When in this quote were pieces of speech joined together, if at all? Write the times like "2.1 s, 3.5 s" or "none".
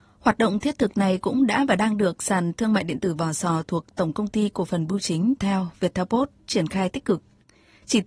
5.4 s